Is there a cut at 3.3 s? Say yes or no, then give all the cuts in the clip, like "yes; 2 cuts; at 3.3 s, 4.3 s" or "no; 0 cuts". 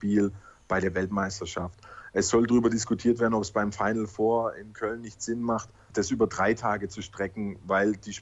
no; 0 cuts